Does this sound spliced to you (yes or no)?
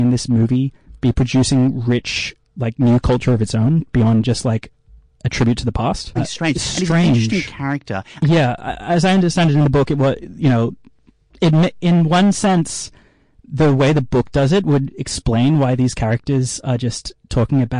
yes